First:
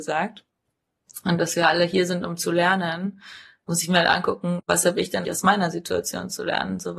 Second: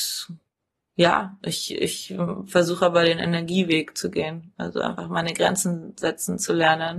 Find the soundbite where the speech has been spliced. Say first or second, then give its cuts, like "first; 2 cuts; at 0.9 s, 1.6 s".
first; 1 cut; at 5.2 s